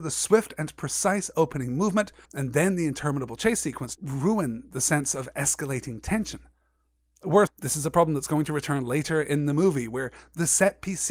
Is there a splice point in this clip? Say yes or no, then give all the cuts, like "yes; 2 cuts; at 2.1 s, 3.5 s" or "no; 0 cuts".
yes; 3 cuts; at 2.3 s, 3.9 s, 7.5 s